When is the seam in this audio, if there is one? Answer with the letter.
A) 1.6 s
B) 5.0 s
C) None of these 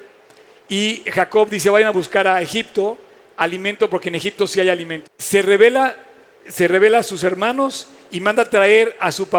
B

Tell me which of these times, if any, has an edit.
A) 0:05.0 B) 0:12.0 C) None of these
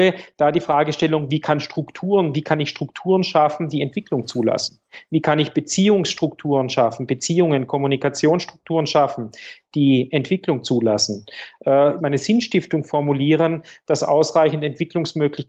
B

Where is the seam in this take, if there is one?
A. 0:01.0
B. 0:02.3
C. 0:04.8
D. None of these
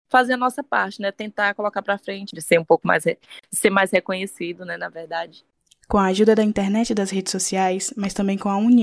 B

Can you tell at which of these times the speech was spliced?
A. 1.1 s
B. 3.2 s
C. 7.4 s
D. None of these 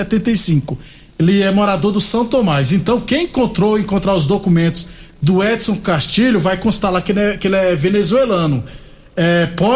A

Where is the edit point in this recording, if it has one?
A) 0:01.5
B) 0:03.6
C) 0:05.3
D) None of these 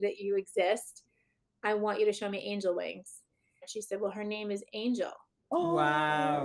B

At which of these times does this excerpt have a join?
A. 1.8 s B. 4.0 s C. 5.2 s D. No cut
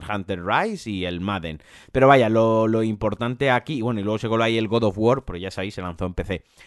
D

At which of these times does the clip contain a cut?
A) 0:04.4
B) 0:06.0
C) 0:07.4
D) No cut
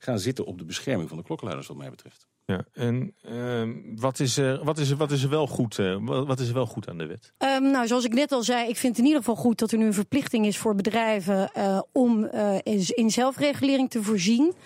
C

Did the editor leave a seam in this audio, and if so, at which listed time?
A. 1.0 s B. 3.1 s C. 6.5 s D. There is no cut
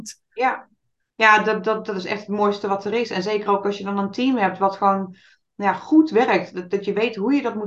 D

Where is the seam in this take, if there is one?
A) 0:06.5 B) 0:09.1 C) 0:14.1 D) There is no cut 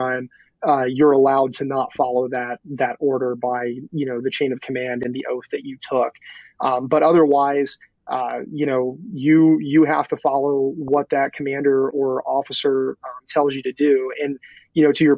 D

